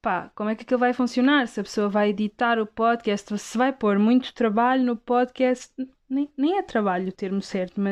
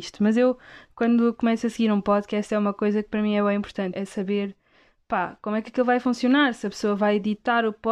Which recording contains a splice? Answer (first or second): second